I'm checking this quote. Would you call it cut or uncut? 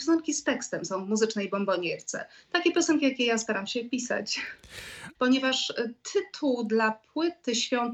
cut